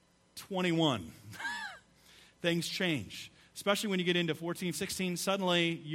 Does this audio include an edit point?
yes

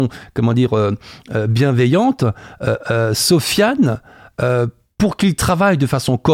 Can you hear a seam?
no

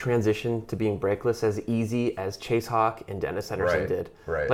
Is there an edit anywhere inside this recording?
no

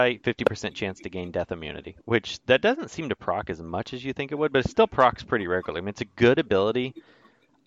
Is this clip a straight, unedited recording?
no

